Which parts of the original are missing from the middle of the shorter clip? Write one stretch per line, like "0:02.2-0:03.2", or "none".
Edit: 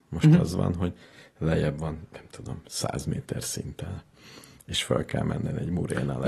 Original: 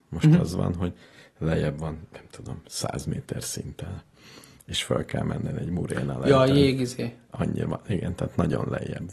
none

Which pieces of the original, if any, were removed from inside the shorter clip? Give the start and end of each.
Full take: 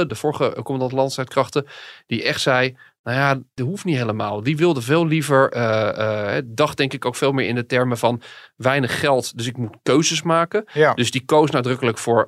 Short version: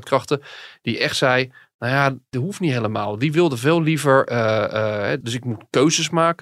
0:06.4-0:09.3

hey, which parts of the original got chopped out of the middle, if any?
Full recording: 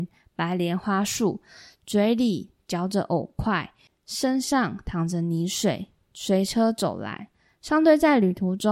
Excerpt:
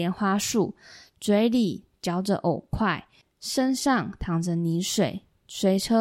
none

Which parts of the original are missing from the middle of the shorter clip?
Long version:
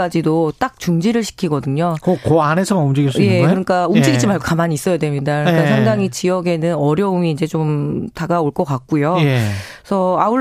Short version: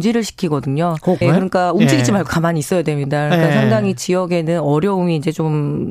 0:02.2-0:03.4

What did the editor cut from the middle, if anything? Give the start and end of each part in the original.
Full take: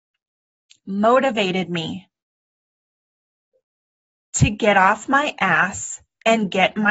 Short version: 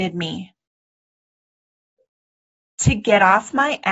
none

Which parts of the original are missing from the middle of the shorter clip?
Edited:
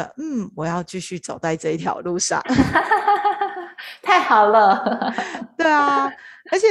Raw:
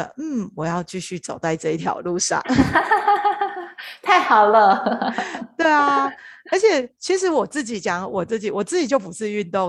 none

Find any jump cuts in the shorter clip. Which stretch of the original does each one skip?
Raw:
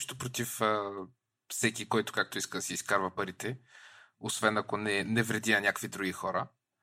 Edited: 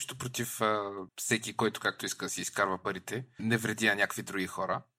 0:01.1-0:01.4
0:03.7-0:05.0

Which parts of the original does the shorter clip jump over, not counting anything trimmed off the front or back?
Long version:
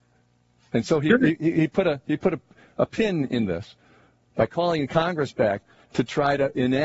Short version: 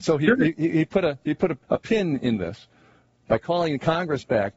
0:02.4-0:02.7

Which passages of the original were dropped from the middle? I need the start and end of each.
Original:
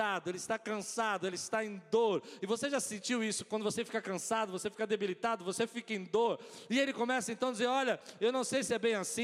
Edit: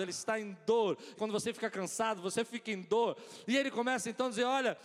0:02.4-0:03.5
0:04.5-0:05.4

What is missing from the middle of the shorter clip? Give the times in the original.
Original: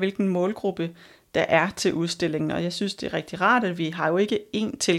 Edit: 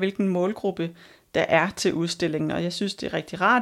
none

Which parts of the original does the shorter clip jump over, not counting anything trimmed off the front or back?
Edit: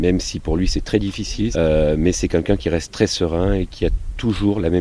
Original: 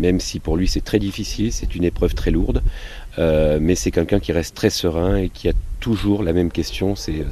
0:01.5-0:03.2

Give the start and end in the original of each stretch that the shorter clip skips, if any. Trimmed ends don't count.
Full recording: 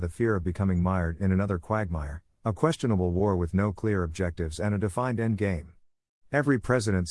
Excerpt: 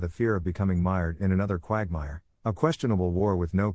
none

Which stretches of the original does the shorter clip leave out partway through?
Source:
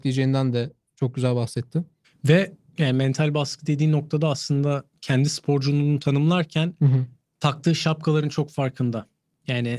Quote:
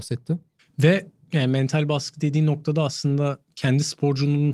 none

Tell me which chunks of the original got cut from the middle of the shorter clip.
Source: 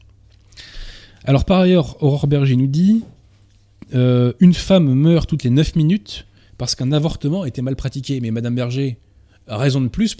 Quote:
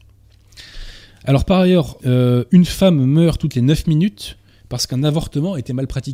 0:02.0-0:03.9

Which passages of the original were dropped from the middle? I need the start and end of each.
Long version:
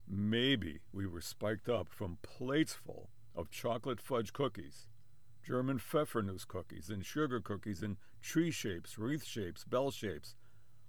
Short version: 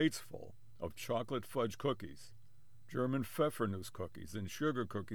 none

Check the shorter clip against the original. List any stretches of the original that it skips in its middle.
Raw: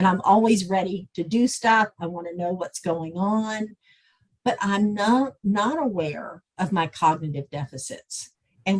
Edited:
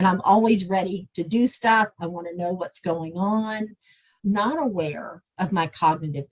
0:04.2-0:05.4

